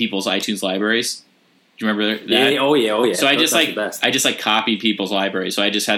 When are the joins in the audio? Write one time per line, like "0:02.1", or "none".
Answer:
none